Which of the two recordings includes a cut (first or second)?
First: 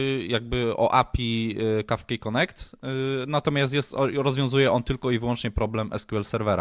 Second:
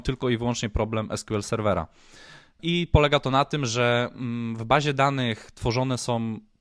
second